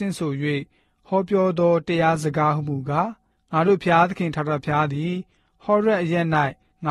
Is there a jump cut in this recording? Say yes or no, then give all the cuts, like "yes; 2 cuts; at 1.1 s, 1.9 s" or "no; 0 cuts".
no; 0 cuts